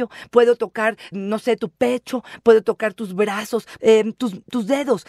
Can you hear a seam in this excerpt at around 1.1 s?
yes; 2 cuts; at 1.1 s, 3.8 s

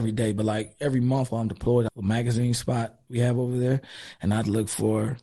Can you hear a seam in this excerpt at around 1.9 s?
yes; 1 cut; at 1.9 s

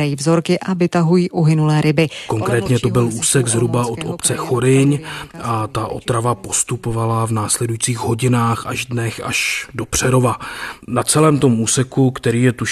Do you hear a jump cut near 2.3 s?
no; 0 cuts

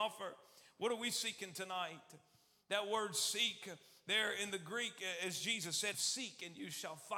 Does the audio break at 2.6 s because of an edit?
no; 1 cut; at 5.9 s

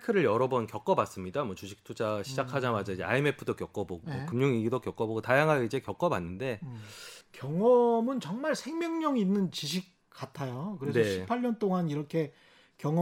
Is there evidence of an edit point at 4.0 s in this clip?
yes; 2 cuts; at 4.0 s, 7.2 s

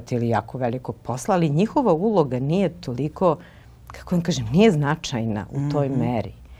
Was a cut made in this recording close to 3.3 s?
no; 0 cuts

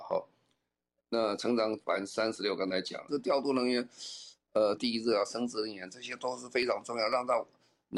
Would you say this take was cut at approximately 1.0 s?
no; 2 cuts; at 3.1 s, 4.8 s

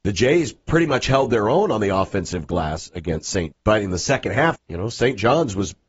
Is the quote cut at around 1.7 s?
no; 2 cuts; at 3.5 s, 4.6 s

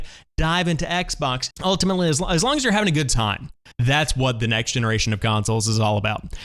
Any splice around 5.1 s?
no; 2 cuts; at 1.5 s, 3.7 s

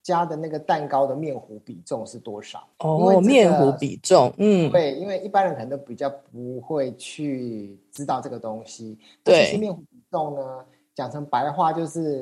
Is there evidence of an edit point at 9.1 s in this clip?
no; 1 cut; at 2.7 s

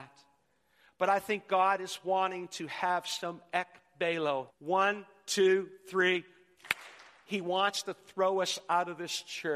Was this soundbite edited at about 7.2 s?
no; 1 cut; at 4.5 s

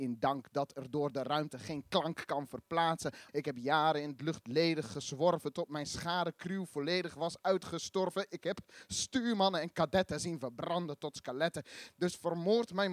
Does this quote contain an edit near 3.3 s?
yes; 1 cut; at 3.3 s

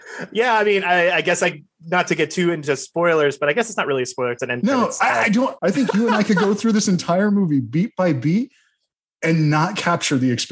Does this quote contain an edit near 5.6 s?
yes; 1 cut; at 5.6 s

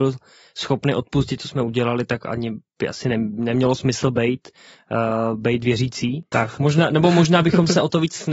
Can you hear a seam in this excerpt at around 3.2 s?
no; 1 cut; at 6.3 s

